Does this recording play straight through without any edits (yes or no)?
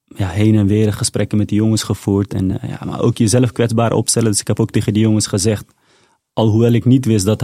yes